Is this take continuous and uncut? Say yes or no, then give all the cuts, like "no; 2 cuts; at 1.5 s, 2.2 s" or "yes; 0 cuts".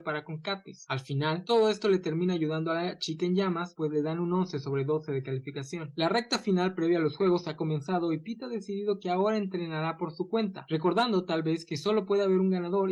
yes; 0 cuts